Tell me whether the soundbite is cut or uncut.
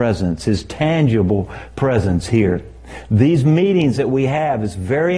uncut